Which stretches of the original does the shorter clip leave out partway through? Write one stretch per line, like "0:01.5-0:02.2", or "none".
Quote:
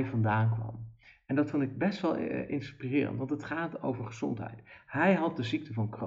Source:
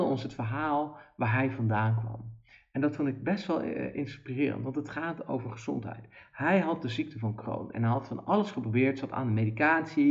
none

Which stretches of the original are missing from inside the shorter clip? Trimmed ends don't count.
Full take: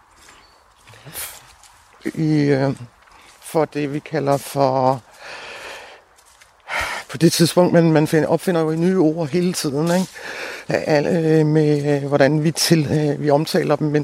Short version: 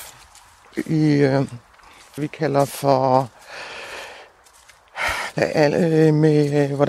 0:03.5-0:03.9
0:07.0-0:10.6

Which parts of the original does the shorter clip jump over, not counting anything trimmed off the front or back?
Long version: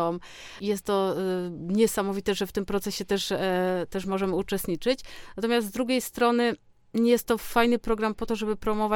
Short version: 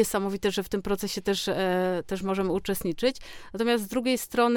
none

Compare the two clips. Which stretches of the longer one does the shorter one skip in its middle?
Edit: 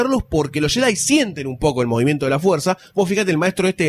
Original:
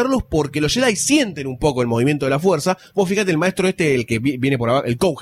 none

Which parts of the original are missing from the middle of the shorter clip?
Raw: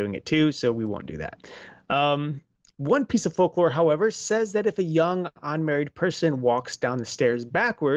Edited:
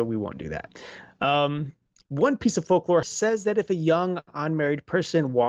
0:03.7-0:04.1

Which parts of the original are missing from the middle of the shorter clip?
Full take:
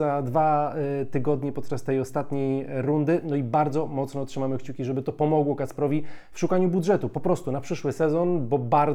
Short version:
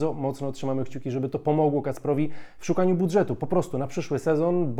none

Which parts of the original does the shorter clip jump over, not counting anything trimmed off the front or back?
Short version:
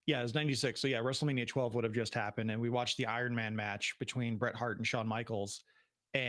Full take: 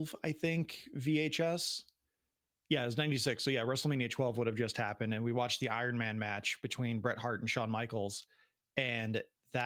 none

